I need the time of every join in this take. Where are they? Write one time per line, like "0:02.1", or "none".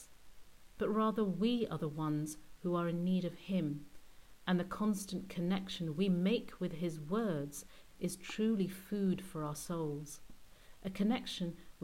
0:07.8

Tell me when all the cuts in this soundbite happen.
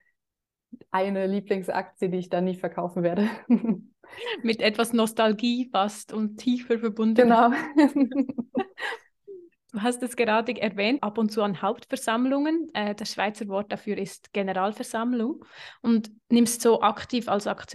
0:11.0

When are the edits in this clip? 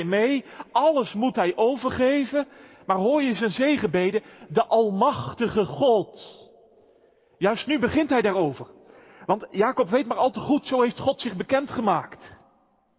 none

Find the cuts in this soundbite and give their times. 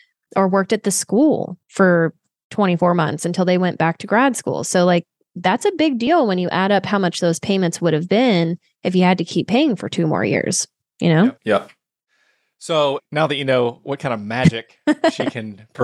0:11.4
0:13.0

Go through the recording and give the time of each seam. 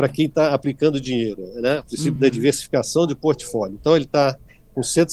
none

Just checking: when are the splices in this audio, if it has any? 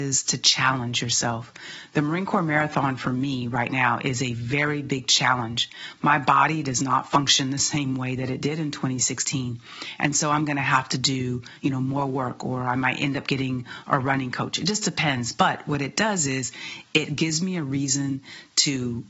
none

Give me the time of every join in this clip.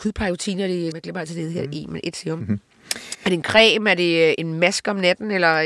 0:00.9
0:04.4

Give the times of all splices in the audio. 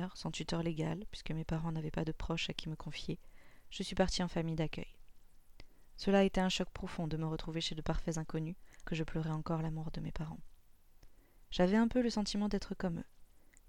0:08.8
0:11.4

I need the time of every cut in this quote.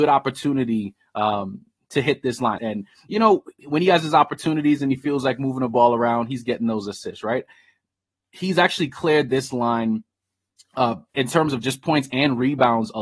0:02.6
0:11.1

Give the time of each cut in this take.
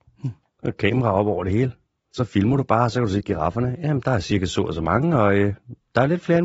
none

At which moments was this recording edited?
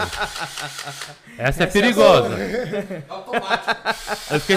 none

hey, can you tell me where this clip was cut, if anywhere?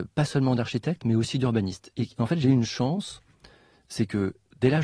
0:01.9

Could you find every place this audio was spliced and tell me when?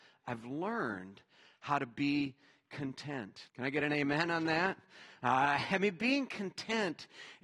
0:03.5

